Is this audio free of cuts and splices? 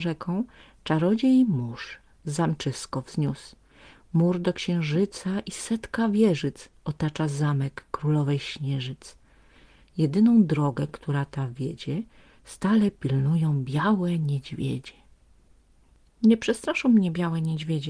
yes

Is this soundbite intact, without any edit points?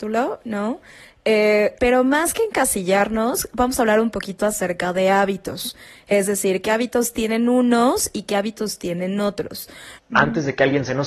no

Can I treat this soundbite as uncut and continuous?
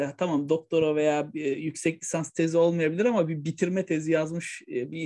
yes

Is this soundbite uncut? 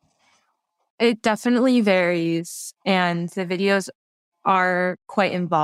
yes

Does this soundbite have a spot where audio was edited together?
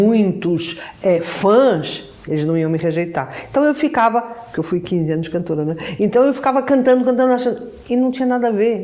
no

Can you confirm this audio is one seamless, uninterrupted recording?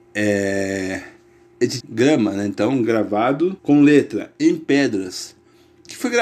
no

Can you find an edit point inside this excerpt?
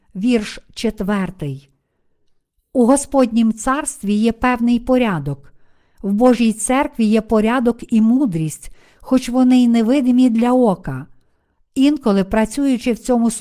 yes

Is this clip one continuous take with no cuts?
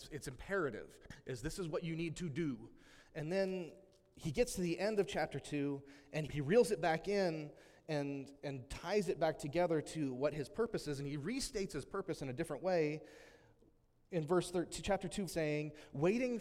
no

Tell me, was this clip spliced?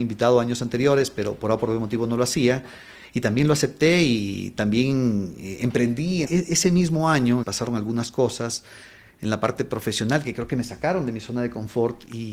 yes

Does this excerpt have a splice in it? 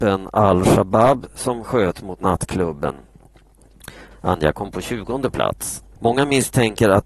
yes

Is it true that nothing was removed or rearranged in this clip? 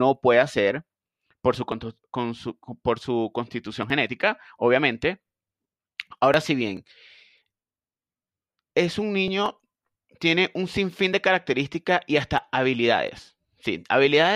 yes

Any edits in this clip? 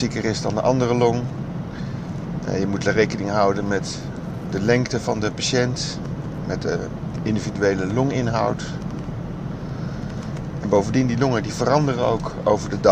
no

